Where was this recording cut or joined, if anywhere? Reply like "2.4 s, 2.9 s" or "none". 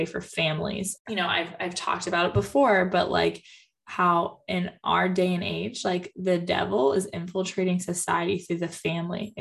1.0 s